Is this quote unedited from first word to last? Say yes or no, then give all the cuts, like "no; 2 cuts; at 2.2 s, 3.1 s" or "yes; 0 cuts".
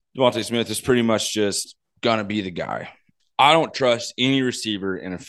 yes; 0 cuts